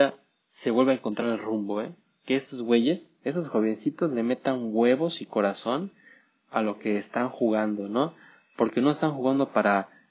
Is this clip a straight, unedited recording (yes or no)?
yes